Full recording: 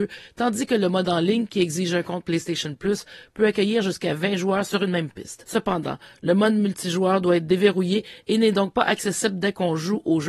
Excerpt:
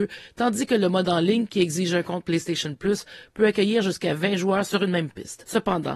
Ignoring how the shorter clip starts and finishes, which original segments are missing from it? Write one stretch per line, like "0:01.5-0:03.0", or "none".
none